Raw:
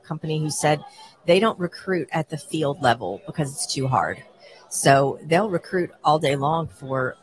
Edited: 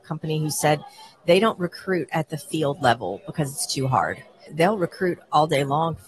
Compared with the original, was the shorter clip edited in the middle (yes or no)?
yes